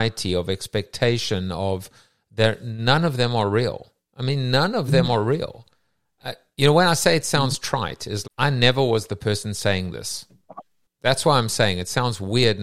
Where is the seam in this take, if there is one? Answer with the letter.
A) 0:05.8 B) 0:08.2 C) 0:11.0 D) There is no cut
B